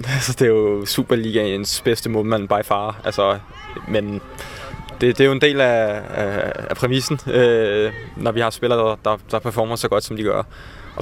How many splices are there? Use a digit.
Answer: 0